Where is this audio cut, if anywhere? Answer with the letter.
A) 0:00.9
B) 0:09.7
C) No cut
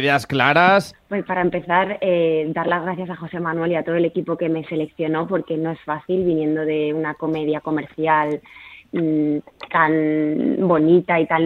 A